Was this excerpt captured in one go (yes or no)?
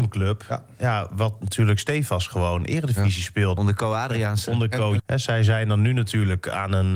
no